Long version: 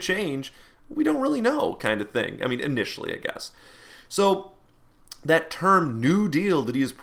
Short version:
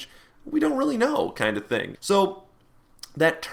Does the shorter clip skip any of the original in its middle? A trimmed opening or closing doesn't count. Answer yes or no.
yes